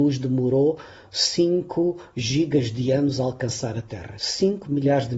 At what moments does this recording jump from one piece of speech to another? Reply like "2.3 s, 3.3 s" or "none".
4.2 s